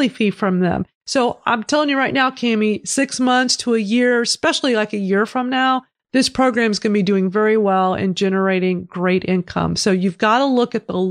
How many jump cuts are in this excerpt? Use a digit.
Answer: 0